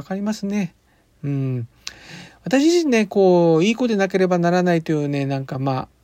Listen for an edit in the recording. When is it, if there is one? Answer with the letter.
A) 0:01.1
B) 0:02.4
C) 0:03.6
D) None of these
D